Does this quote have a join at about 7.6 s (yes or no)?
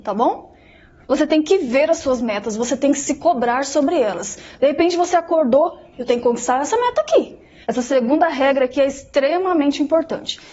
yes